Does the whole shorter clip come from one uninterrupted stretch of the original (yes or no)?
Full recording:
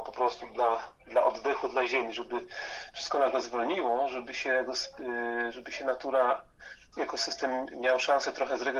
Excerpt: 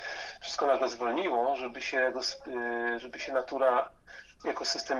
yes